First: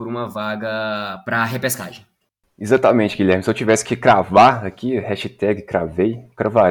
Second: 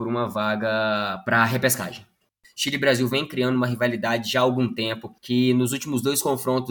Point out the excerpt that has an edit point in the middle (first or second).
second